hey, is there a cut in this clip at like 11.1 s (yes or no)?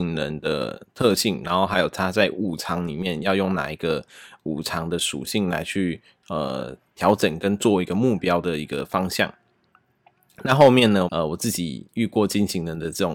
yes